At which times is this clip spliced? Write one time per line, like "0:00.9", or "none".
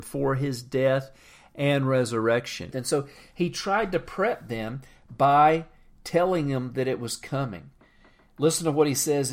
0:02.7